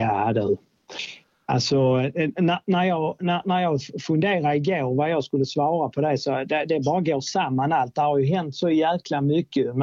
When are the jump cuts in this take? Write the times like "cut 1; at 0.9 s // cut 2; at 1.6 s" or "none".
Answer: none